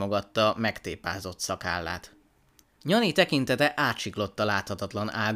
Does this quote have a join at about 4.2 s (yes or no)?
no